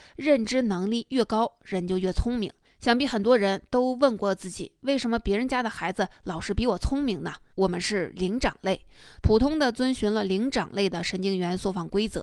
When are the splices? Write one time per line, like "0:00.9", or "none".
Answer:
0:02.6
0:07.5
0:09.2